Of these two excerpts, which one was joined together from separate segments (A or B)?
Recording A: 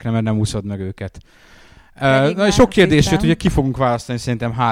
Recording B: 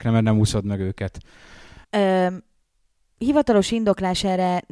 B